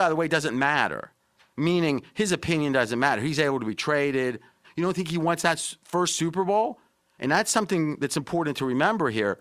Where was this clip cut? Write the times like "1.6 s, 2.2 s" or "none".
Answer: 4.6 s, 7.2 s